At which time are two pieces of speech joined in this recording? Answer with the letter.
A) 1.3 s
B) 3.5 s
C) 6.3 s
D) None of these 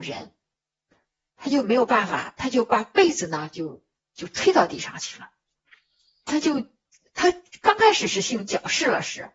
C